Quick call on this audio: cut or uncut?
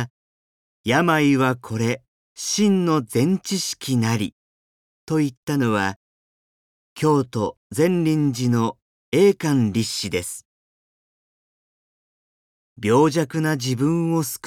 uncut